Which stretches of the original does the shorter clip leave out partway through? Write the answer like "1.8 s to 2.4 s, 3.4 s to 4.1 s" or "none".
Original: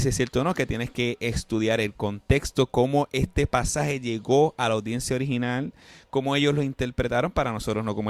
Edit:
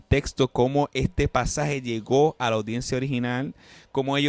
none

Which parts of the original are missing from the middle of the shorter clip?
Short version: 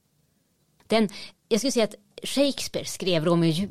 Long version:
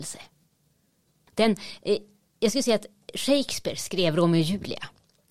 1.8 s to 2.2 s

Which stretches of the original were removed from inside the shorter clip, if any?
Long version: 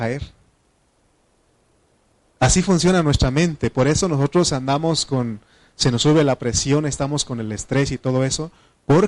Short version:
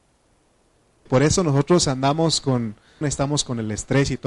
1.8 s to 3.7 s, 5.7 s to 6.8 s

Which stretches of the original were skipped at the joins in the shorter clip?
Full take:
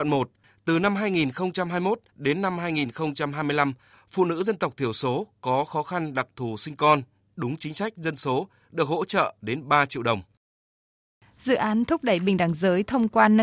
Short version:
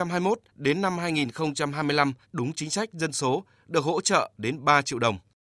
3.8 s to 7.3 s

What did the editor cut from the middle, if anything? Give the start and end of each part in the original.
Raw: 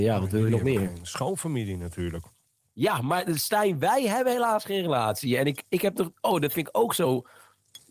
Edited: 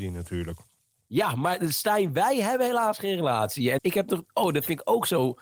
5.4 s to 5.7 s

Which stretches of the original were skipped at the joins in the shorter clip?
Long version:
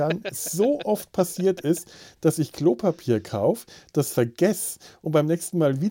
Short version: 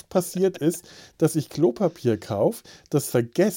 none

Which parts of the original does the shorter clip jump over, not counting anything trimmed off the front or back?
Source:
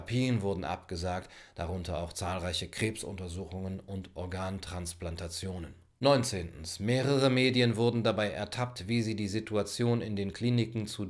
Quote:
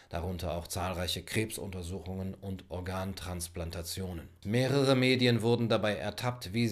5.9 s to 6.8 s

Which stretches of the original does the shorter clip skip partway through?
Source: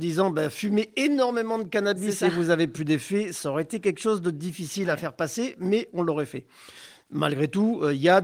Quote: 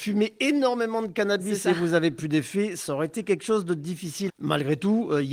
4.8 s to 7.0 s

